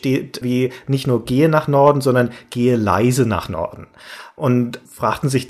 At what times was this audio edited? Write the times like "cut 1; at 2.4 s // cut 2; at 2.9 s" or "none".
none